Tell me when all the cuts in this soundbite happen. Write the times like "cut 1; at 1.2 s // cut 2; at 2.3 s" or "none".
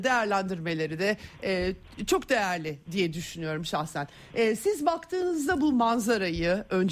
none